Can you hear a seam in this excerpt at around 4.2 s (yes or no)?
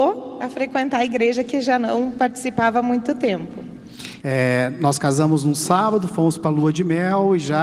yes